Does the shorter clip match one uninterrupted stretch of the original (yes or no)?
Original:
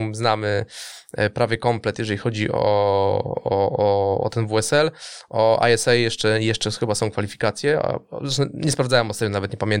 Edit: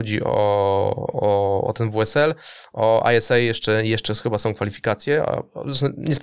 no